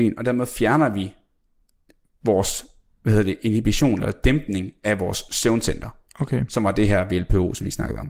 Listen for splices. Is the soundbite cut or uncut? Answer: uncut